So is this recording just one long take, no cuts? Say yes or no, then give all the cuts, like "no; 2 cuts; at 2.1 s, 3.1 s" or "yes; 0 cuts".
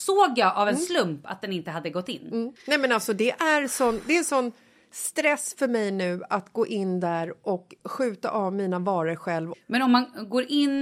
no; 2 cuts; at 2.6 s, 9.5 s